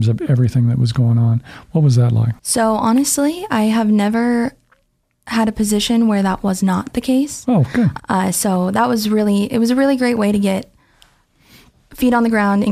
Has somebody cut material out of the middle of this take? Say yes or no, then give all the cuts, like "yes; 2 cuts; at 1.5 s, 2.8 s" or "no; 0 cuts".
yes; 2 cuts; at 2.4 s, 8.0 s